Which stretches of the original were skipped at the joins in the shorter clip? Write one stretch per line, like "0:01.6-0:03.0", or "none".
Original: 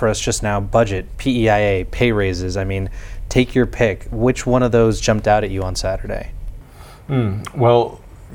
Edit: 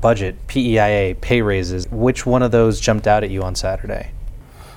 0:02.5-0:04.0